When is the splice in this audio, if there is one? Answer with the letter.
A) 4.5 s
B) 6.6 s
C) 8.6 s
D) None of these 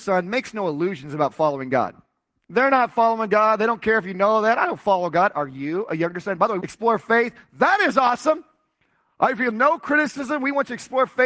B